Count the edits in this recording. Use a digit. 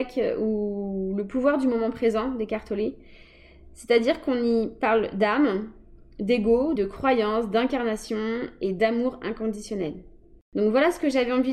1